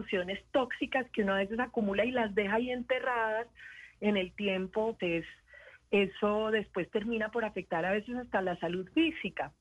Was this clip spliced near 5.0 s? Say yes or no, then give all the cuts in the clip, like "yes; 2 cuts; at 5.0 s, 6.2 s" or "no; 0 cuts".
yes; 1 cut; at 5.0 s